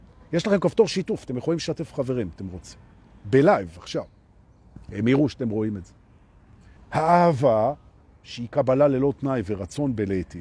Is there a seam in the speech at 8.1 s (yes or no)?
no